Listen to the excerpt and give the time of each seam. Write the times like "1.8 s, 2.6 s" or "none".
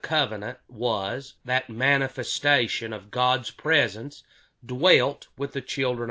1.4 s

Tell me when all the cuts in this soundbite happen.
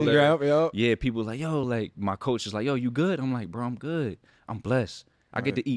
none

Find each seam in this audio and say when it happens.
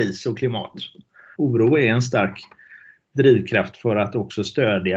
1.3 s

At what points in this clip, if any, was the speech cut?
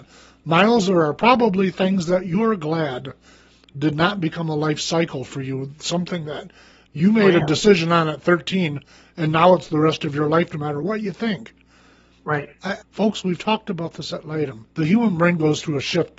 12.8 s, 14.7 s

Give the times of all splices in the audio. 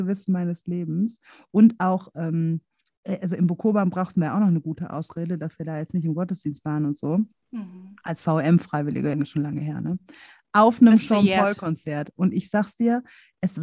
9.1 s

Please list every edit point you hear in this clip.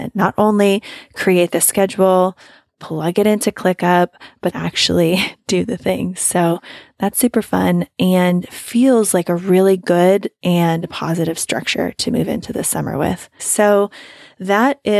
4.5 s, 13.4 s

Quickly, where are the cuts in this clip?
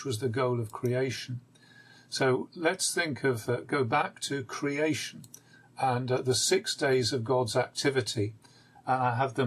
none

